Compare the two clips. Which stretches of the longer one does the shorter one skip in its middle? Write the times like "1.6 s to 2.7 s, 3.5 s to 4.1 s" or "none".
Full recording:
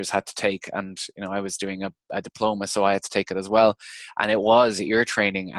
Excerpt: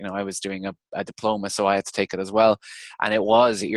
none